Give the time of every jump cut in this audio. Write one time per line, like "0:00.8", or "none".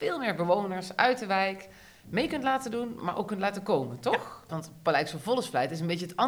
0:04.5